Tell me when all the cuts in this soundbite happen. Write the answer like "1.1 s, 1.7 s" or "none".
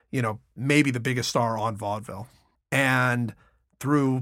2.6 s